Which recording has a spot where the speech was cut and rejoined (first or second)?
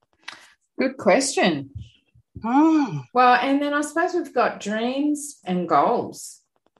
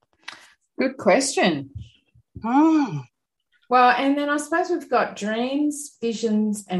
first